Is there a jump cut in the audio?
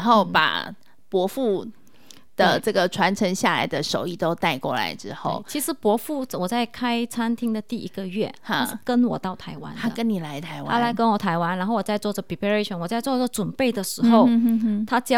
no; 0 cuts

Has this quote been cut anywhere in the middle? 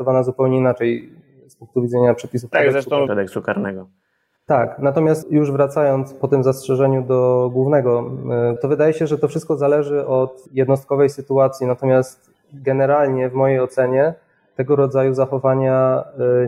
yes; 2 cuts; at 3.1 s, 8.6 s

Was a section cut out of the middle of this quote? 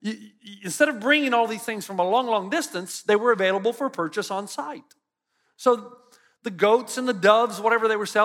no; 0 cuts

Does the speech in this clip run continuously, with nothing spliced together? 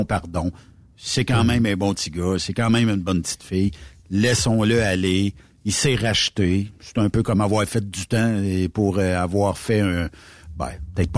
yes; 0 cuts

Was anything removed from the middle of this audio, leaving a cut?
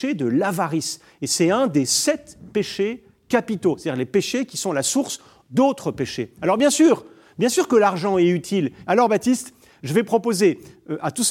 yes; 1 cut; at 8.8 s

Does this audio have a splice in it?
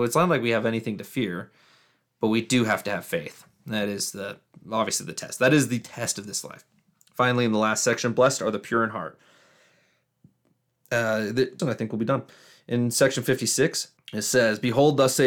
yes; 2 cuts; at 11.6 s, 14.0 s

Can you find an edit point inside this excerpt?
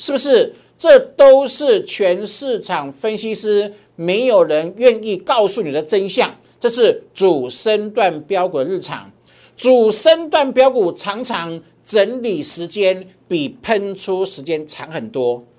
no; 0 cuts

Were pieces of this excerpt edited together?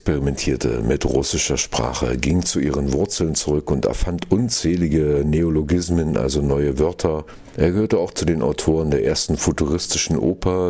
yes; 1 cut; at 7.5 s

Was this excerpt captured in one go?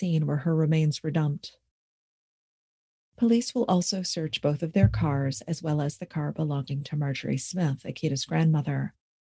yes; 0 cuts

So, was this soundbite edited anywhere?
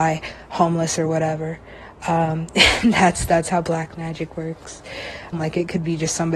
yes; 1 cut; at 5.3 s

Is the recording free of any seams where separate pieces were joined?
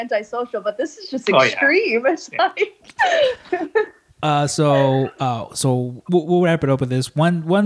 yes; 0 cuts

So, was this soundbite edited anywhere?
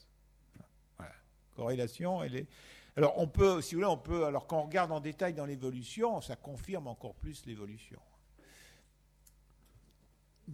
no; 0 cuts

